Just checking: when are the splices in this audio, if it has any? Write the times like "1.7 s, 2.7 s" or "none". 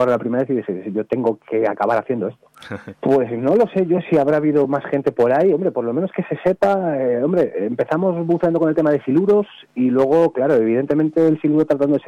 2.9 s